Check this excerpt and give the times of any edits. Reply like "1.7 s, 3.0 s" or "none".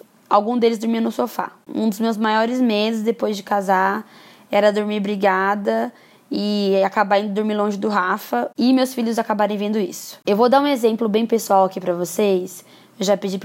1.7 s, 10.2 s